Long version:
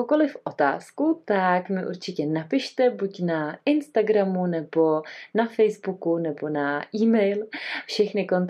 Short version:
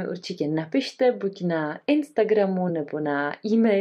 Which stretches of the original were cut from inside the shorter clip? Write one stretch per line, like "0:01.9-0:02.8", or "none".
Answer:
0:04.5-0:06.2